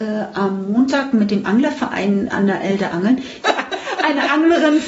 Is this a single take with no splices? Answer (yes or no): no